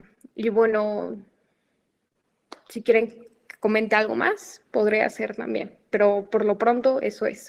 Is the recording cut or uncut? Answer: uncut